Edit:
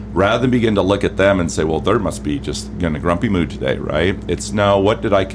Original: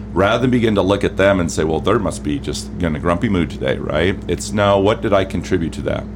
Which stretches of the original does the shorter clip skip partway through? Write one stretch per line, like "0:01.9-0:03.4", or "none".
none